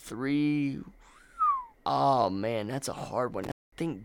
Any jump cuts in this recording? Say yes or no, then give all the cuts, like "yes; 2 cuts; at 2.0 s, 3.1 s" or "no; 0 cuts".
yes; 1 cut; at 1.7 s